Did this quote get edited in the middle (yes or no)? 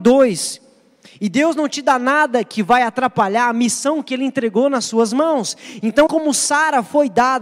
yes